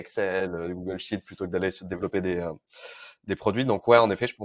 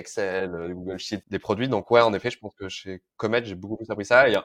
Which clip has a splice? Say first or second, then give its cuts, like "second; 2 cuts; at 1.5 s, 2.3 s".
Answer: second; 1 cut; at 1.2 s